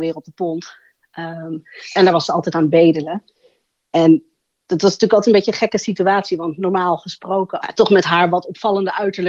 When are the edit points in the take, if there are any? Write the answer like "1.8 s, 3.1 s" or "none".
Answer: 7.6 s